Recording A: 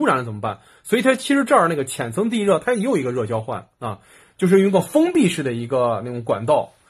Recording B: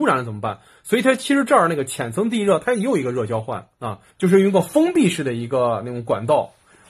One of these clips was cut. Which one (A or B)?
B